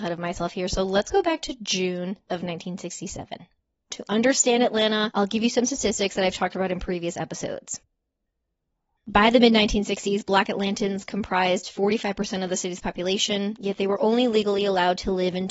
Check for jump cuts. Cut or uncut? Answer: uncut